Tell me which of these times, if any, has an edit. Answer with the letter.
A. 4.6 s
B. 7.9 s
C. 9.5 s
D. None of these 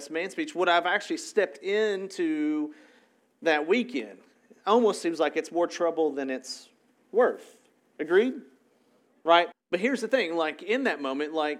C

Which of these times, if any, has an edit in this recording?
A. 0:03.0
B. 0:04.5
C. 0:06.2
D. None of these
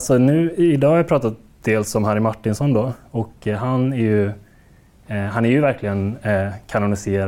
D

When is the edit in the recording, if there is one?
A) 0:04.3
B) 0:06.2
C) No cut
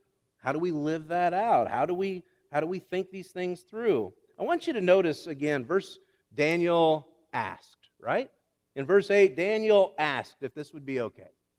B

